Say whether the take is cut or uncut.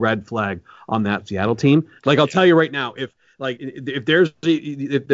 cut